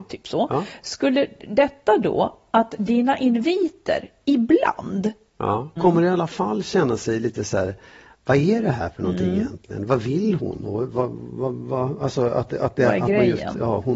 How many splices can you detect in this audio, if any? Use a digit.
1